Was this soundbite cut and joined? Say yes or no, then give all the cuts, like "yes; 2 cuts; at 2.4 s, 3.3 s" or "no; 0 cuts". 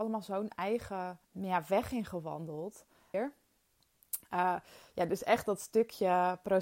yes; 2 cuts; at 1.2 s, 3.1 s